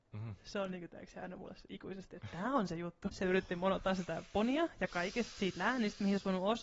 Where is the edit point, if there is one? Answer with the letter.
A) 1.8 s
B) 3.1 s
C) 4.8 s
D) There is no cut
B